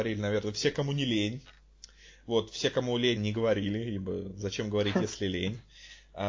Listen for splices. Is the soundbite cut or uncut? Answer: cut